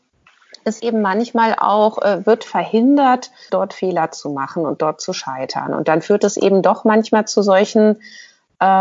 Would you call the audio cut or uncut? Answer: cut